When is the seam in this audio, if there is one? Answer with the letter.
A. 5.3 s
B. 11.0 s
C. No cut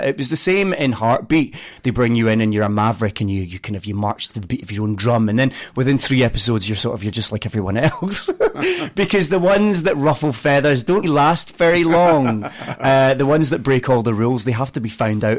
B